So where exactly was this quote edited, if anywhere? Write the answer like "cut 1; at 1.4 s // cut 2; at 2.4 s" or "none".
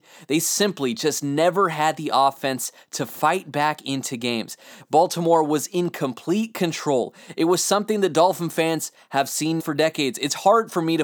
cut 1; at 4.8 s // cut 2; at 9.6 s